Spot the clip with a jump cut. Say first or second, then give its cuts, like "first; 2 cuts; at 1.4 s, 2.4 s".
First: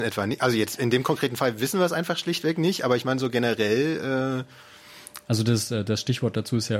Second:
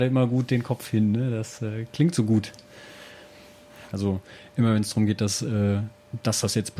second; 1 cut; at 3.9 s